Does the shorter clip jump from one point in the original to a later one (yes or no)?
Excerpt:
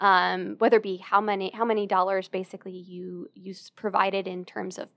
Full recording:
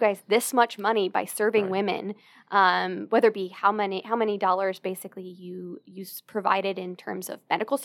no